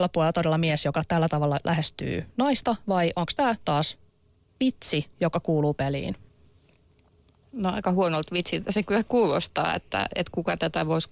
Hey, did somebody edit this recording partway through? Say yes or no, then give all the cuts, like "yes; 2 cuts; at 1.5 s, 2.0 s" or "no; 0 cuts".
no; 0 cuts